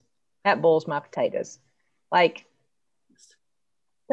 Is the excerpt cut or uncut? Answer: uncut